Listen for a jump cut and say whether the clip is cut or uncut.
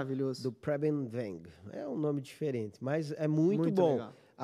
uncut